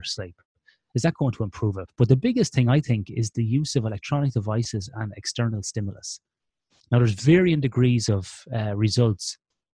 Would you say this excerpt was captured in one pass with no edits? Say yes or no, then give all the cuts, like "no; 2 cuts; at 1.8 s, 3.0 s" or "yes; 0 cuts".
no; 1 cut; at 1.9 s